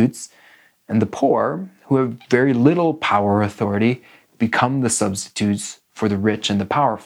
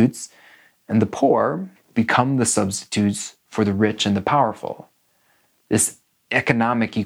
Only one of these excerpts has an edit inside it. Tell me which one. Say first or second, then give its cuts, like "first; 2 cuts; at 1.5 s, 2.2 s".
second; 1 cut; at 1.8 s